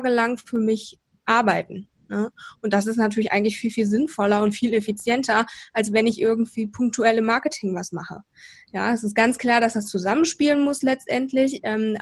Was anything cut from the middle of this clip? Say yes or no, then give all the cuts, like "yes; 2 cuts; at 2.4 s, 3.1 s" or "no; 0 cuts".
no; 0 cuts